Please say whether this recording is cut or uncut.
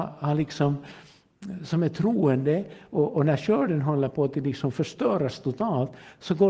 uncut